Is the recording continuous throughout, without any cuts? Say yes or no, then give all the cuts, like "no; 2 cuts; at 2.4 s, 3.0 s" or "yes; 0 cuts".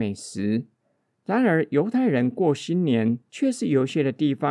yes; 0 cuts